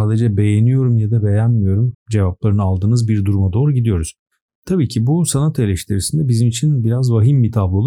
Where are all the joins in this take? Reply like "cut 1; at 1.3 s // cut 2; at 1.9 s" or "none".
cut 1; at 1.9 s